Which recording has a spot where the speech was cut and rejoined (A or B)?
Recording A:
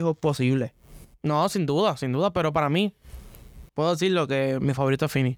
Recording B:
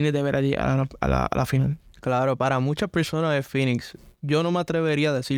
A